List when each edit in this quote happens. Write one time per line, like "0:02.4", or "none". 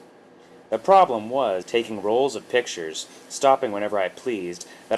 0:01.6